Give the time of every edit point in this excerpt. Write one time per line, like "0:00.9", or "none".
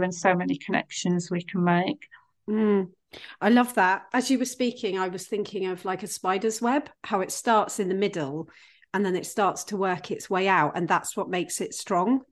none